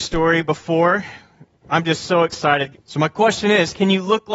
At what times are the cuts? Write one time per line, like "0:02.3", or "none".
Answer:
0:01.6
0:02.7